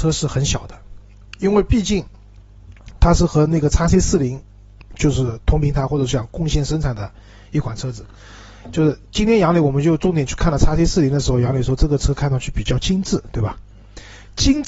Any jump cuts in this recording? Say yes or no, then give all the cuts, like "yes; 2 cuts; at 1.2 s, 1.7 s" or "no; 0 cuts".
no; 0 cuts